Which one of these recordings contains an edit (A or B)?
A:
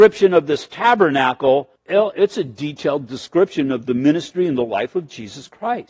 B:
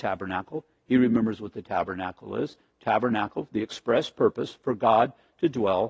A